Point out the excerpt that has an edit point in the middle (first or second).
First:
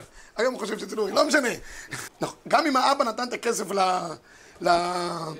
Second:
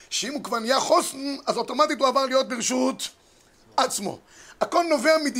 first